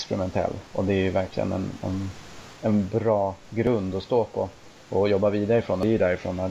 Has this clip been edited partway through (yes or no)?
yes